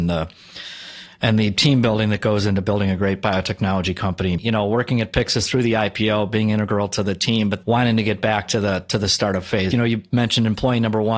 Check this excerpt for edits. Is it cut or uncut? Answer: cut